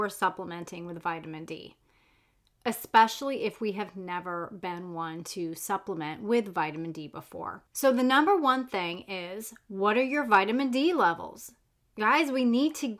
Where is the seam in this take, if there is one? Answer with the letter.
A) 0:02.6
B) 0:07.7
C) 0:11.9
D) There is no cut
B